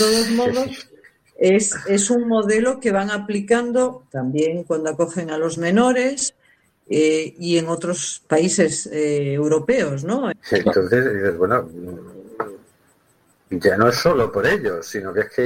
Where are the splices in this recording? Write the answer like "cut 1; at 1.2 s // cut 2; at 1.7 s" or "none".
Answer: cut 1; at 4.1 s // cut 2; at 10.3 s